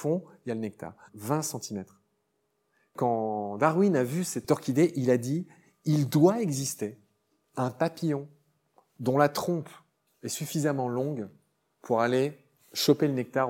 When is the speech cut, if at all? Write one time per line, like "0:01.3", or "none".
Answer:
0:01.1

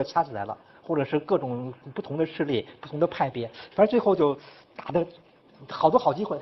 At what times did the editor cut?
none

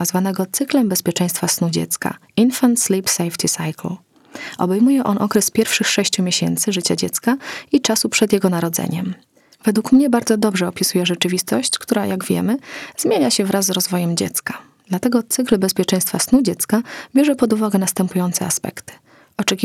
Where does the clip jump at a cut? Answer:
none

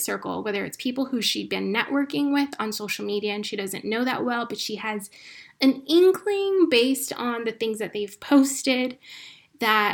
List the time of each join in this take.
none

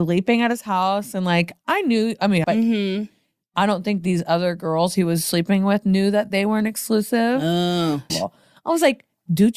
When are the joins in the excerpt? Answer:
0:02.4
0:08.1

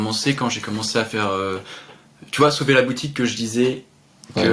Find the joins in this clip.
none

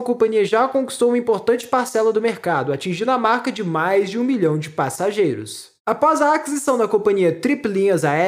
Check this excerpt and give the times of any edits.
0:05.8

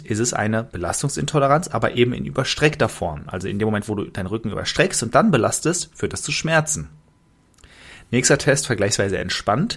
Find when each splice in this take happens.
none

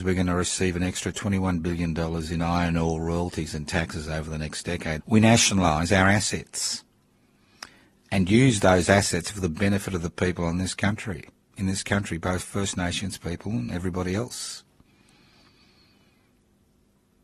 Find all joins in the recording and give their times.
0:05.0

